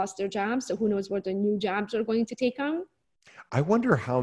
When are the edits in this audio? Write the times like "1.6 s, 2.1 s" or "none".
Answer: none